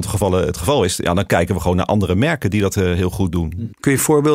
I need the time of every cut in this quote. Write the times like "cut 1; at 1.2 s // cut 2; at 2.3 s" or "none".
none